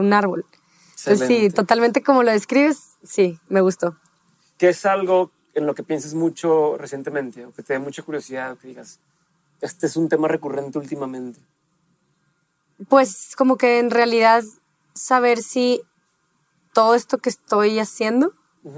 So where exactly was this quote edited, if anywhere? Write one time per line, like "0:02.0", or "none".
none